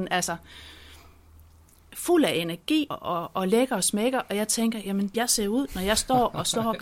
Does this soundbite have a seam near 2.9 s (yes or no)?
yes